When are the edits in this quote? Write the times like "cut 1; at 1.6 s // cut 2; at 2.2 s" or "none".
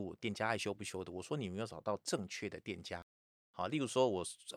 cut 1; at 3.3 s